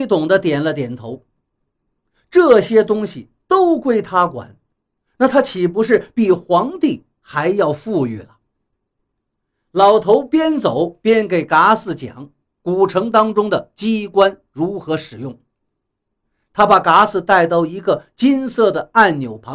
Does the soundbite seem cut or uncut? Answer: uncut